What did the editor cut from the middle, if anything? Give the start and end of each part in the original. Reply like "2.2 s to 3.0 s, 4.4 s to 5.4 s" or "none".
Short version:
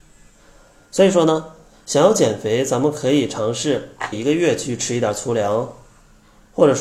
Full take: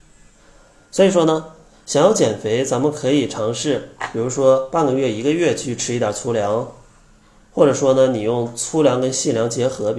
4.1 s to 5.1 s